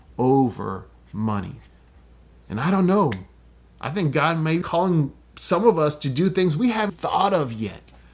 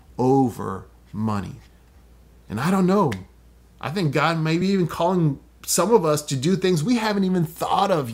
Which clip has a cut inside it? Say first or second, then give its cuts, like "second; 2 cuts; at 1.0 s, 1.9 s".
first; 2 cuts; at 4.6 s, 6.9 s